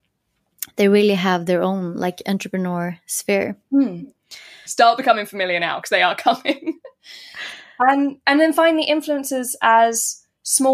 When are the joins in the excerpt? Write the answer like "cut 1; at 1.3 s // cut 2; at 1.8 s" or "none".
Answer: cut 1; at 4.7 s